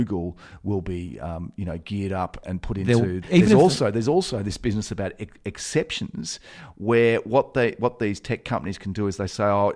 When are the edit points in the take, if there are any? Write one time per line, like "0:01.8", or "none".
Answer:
0:03.2